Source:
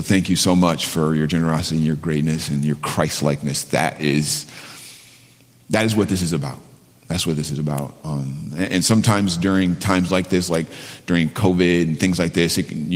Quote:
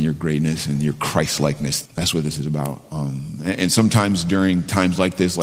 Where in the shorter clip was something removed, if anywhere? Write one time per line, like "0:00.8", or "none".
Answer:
0:01.8